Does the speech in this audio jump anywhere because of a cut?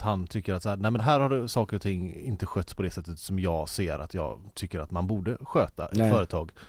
yes; 1 cut; at 1.0 s

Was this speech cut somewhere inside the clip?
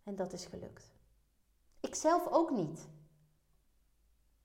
yes; 1 cut; at 1.7 s

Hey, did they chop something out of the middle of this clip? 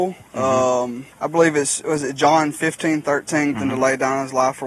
yes; 2 cuts; at 1.1 s, 3.5 s

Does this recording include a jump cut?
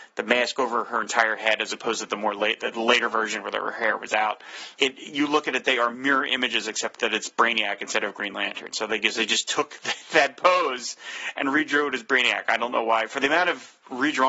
yes; 1 cut; at 4.8 s

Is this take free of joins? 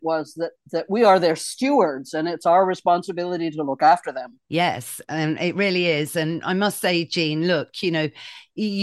no; 1 cut; at 4.4 s

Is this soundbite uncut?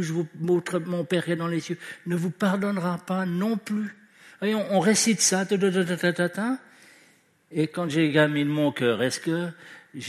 yes; 0 cuts

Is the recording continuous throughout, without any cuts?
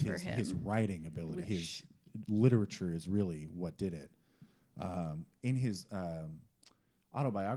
no; 1 cut; at 1.4 s

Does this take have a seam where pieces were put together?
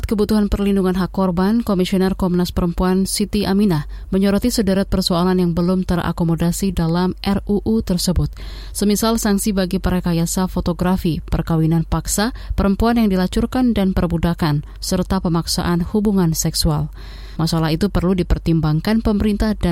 yes; 1 cut; at 17.4 s

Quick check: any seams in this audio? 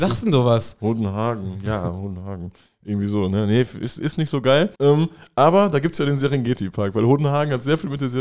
yes; 1 cut; at 4.7 s

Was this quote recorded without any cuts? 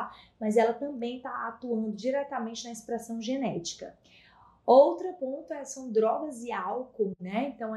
yes; 0 cuts

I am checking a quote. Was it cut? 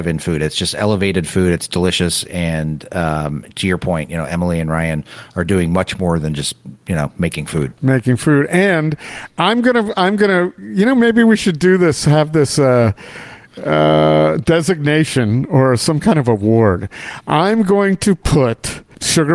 no; 0 cuts

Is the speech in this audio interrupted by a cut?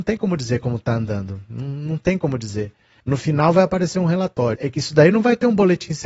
yes; 2 cuts; at 3.0 s, 4.6 s

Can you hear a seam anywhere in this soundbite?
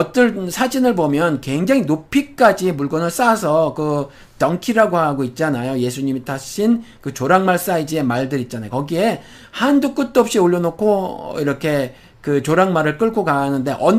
no; 0 cuts

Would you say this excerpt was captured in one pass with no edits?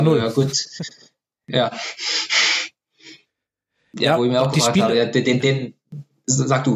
yes; 0 cuts

